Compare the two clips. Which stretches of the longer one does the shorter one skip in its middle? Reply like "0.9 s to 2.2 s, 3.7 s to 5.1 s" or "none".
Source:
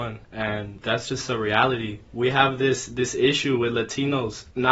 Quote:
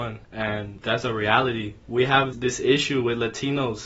1.0 s to 1.3 s, 2.6 s to 2.9 s